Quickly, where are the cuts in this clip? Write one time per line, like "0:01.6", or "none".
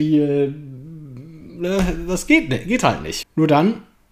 0:03.2